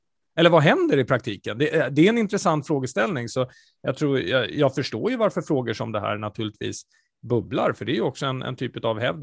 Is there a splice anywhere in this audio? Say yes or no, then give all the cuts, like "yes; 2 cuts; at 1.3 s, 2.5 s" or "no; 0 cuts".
no; 0 cuts